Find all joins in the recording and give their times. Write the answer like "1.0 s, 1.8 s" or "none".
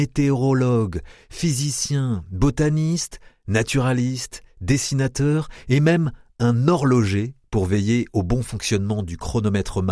none

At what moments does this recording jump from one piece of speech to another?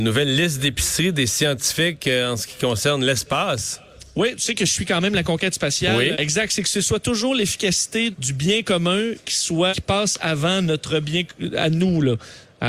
6.1 s, 8.1 s, 9.7 s

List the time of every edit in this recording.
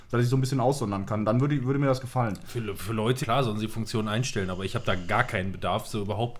3.2 s

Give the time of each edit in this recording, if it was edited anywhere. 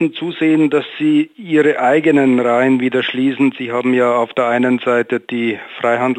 none

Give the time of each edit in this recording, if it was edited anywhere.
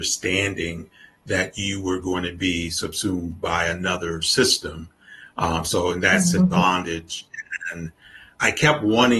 6.4 s

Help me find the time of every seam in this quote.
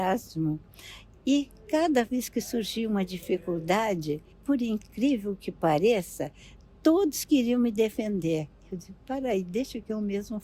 4.3 s

